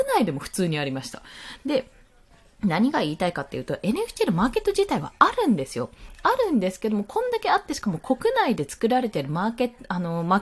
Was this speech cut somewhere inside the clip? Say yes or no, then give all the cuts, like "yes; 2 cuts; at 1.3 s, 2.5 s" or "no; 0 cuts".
no; 0 cuts